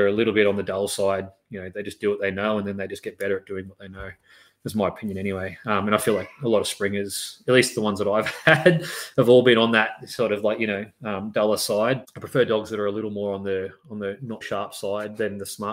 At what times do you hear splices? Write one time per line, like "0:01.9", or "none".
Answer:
0:12.0
0:14.4